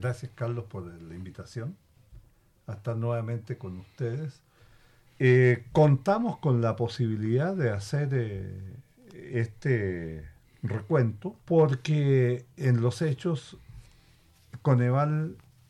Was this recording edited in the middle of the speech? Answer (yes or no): yes